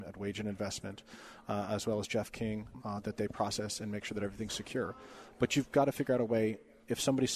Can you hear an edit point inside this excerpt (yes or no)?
yes